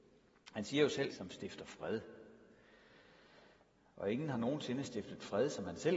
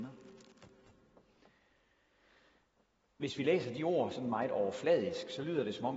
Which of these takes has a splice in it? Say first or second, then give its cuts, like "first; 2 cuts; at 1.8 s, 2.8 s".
first; 1 cut; at 1.1 s